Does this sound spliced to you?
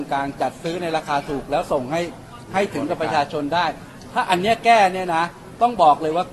no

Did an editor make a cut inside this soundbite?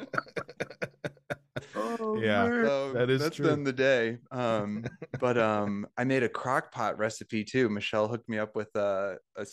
no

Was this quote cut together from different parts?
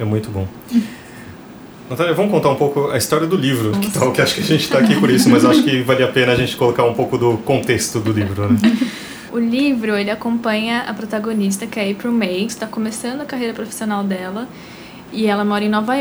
yes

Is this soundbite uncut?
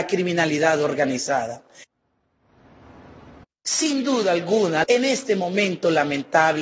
no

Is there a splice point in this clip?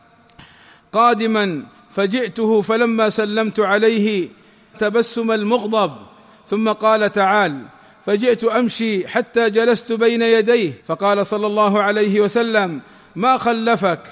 yes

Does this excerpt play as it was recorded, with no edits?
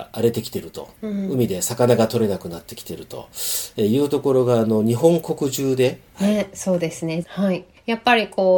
no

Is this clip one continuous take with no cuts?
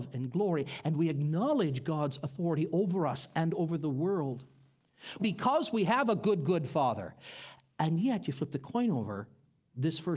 no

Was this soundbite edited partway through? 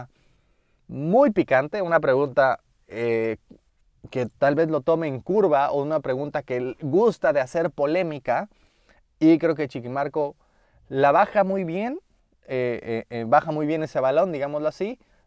no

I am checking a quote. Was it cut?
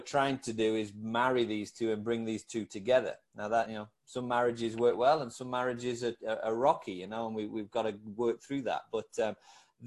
no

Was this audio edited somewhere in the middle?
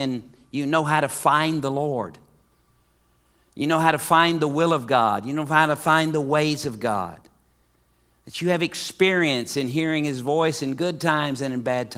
no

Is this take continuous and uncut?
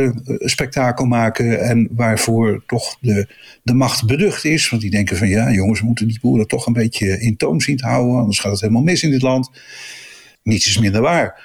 no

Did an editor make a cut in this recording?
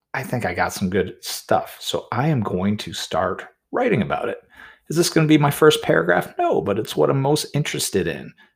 no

